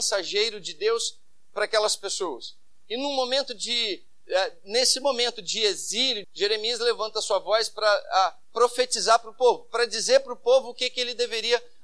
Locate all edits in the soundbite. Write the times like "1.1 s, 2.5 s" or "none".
6.2 s